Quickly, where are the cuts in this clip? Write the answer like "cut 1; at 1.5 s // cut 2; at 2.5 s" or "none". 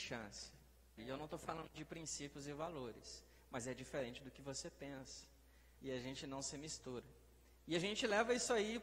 cut 1; at 1.0 s // cut 2; at 5.8 s